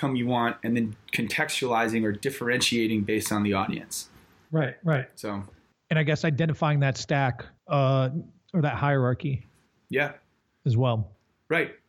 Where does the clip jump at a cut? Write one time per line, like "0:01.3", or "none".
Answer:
0:07.6